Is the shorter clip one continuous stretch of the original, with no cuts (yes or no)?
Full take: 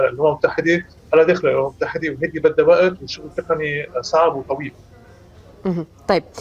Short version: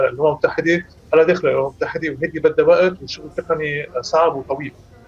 yes